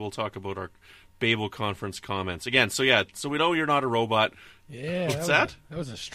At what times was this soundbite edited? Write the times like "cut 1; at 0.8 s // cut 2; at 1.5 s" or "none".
cut 1; at 4.6 s